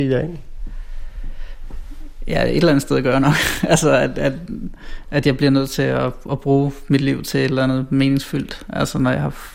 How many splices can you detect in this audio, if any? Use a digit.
0